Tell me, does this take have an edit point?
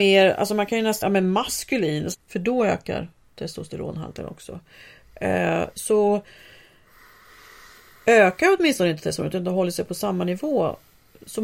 yes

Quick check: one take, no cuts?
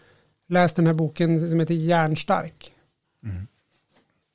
no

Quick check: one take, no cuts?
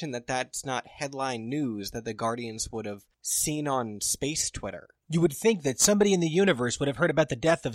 yes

